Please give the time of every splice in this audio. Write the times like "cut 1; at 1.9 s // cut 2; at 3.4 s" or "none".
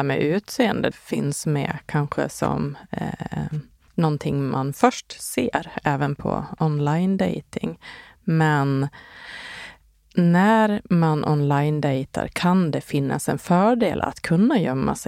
cut 1; at 0.9 s